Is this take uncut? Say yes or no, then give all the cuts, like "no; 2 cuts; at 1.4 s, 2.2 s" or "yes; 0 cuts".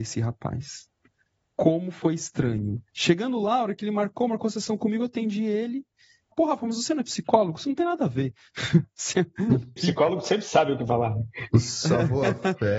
no; 3 cuts; at 2.9 s, 6.3 s, 9.8 s